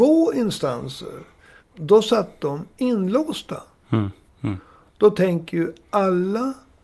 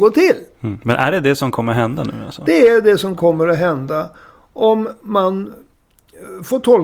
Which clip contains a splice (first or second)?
first